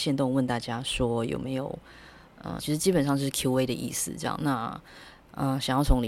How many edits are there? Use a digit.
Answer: 1